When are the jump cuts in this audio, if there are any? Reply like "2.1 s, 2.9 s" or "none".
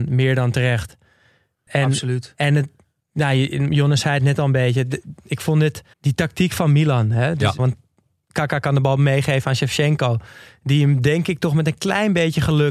1.7 s, 5.9 s, 7.6 s